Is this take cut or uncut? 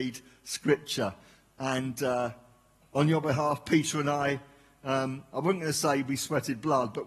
uncut